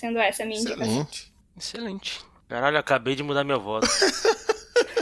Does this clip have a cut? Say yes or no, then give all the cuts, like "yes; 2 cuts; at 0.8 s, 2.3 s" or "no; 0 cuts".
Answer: no; 0 cuts